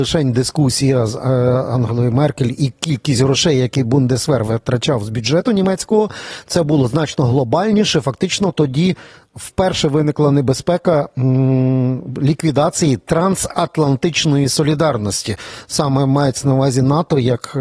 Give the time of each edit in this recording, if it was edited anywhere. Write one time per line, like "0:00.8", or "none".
none